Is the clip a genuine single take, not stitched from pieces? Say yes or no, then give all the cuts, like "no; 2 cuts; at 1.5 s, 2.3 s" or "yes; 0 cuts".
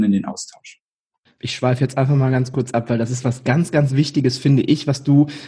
yes; 0 cuts